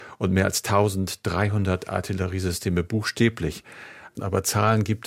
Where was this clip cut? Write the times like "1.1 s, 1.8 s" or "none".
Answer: 4.2 s